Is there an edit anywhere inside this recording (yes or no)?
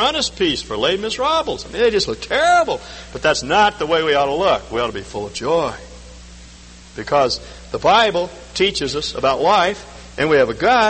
no